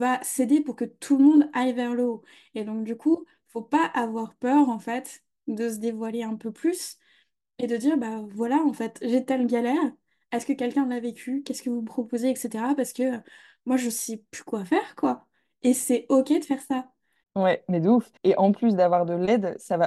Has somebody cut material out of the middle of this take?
yes; 1 cut; at 18.2 s

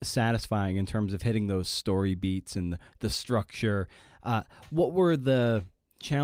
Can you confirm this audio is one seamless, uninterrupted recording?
yes; 0 cuts

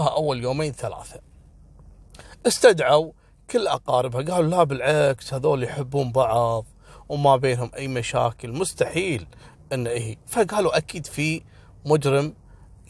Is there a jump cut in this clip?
no; 0 cuts

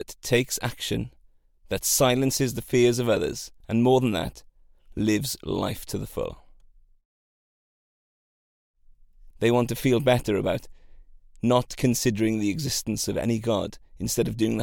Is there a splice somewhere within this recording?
yes; 2 cuts; at 3.6 s, 9.3 s

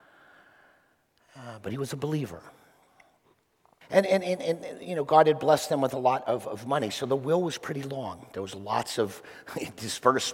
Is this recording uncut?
no; 1 cut; at 3.8 s

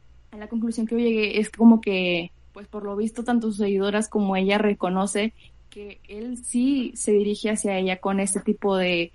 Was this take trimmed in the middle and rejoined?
no; 0 cuts

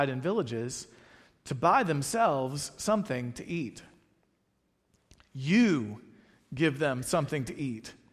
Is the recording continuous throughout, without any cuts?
yes; 0 cuts

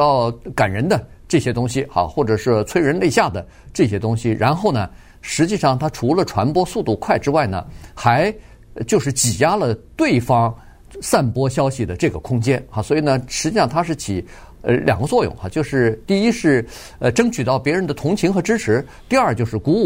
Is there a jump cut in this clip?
no; 0 cuts

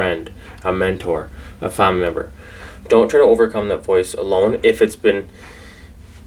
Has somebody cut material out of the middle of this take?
no; 0 cuts

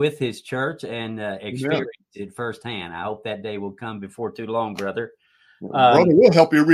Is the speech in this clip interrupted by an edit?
no; 0 cuts

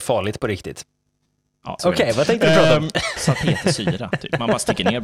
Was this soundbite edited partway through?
yes; 2 cuts; at 1.8 s, 3.2 s

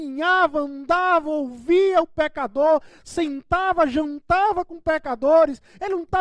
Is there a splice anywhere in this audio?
no; 0 cuts

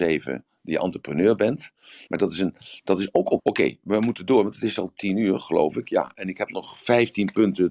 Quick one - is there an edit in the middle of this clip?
yes; 2 cuts; at 2.1 s, 3.4 s

